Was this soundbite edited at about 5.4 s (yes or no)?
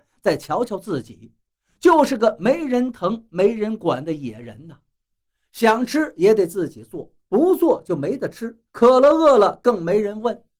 no